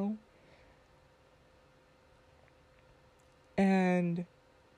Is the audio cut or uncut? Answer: uncut